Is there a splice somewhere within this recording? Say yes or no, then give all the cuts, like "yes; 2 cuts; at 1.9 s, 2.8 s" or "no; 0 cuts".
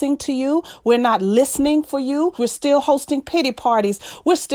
yes; 1 cut; at 2.4 s